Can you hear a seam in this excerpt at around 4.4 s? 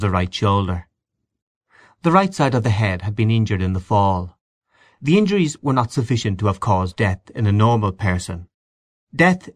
no; 0 cuts

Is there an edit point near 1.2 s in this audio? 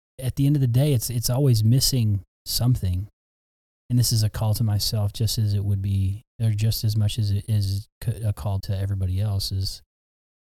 no; 2 cuts; at 3.7 s, 8.6 s

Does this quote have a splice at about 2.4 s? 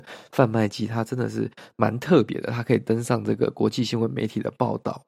no; 0 cuts

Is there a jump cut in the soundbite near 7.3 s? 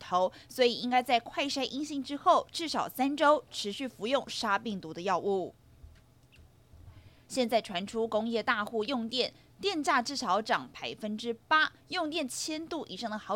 yes; 1 cut; at 7.3 s

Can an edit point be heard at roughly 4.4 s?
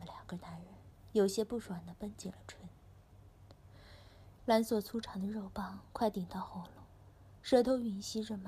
yes; 2 cuts; at 4.4 s, 7.4 s

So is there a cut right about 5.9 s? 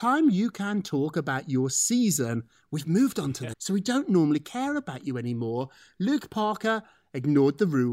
no; 1 cut; at 3.5 s

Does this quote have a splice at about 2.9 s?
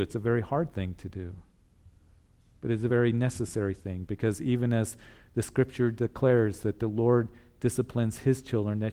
no; 0 cuts

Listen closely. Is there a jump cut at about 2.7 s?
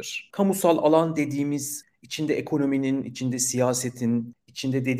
no; 0 cuts

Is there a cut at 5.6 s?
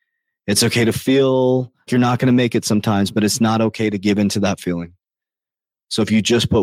no; 1 cut; at 1.9 s

